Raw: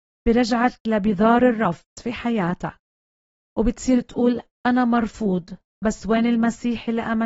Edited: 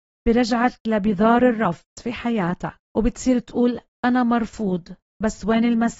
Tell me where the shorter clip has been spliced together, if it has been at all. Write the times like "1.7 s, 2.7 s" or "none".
2.9 s